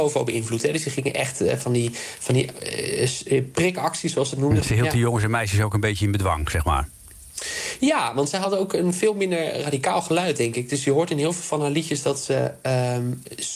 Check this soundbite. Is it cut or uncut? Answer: cut